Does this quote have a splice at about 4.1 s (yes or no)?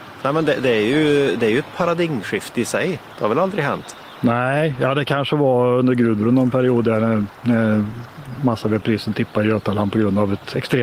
yes